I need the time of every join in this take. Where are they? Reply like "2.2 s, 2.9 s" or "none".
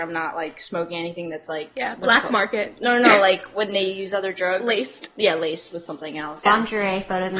6.5 s